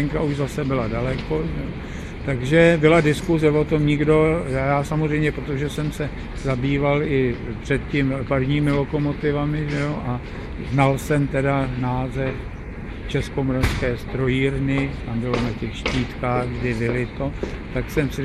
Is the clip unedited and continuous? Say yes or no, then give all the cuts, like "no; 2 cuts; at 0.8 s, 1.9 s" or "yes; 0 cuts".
yes; 0 cuts